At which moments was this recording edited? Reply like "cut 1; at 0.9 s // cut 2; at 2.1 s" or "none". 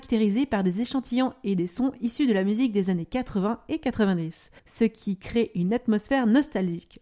cut 1; at 4.6 s